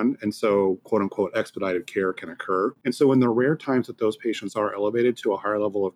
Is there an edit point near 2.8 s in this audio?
yes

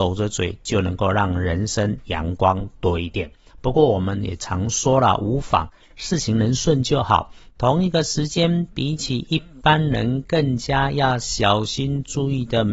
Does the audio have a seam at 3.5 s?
yes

